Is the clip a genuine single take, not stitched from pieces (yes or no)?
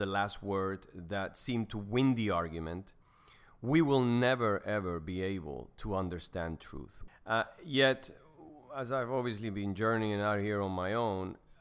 no